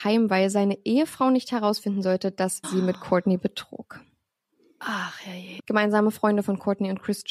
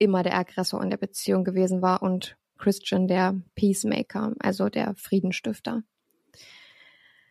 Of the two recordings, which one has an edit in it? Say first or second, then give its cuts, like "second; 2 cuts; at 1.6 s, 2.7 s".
first; 2 cuts; at 2.6 s, 5.6 s